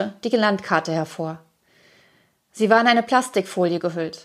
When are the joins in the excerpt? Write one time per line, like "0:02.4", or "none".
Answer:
none